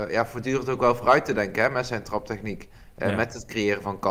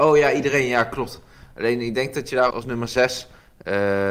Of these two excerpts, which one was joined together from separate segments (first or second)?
second